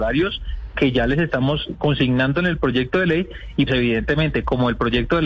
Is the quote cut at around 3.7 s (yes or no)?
yes